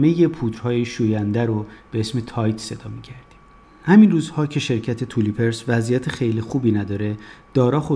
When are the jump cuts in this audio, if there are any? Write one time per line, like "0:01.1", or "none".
none